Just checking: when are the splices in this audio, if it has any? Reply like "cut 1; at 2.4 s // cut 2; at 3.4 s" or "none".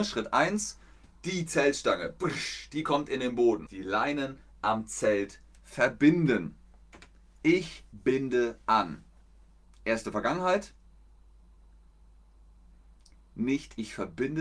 cut 1; at 3.7 s

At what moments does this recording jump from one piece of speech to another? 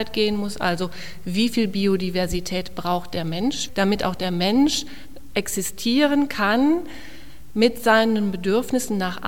cut 1; at 3.7 s

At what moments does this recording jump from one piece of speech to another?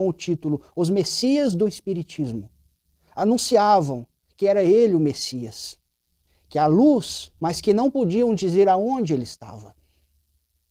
cut 1; at 7.4 s

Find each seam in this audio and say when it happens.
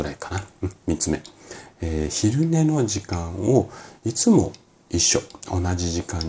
none

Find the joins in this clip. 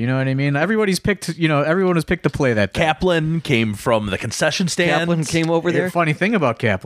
none

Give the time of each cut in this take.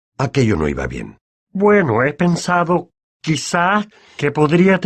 cut 1; at 1.4 s

